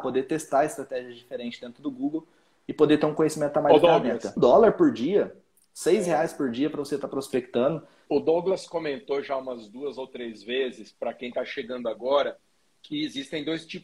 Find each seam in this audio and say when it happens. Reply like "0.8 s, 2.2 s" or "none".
4.4 s, 8.1 s